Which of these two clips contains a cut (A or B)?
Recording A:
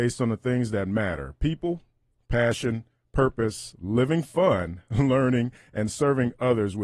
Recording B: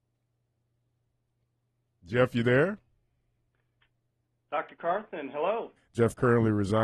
B